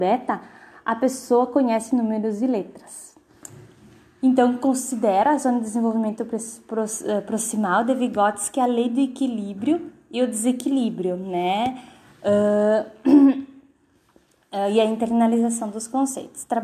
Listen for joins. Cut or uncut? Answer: uncut